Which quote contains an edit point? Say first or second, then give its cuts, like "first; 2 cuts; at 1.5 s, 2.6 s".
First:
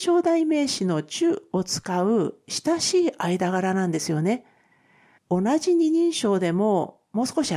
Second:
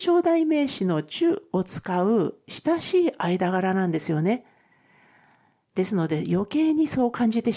first; 1 cut; at 5.2 s